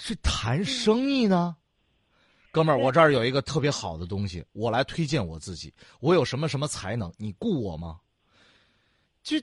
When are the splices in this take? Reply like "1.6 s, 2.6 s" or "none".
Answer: none